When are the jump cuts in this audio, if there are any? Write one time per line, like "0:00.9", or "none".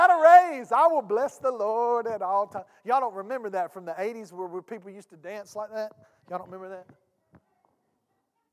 none